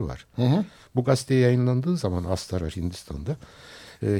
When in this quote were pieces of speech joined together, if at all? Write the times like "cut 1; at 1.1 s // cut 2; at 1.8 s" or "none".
none